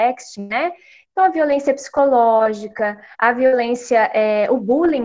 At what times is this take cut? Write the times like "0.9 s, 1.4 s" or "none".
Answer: 1.0 s, 3.1 s